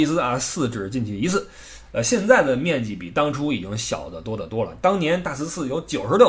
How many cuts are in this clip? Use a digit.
0